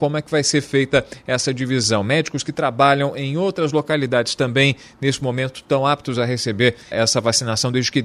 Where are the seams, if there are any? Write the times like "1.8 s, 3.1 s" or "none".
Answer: 6.9 s